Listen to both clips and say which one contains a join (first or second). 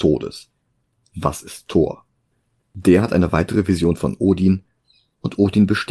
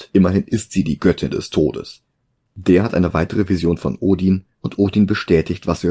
second